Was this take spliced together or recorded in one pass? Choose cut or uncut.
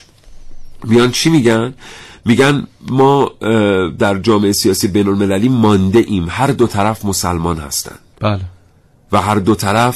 uncut